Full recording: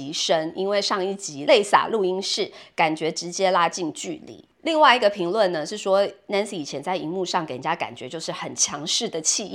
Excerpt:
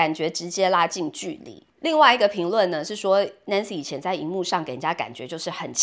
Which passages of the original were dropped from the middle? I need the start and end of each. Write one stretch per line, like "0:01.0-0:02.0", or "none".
none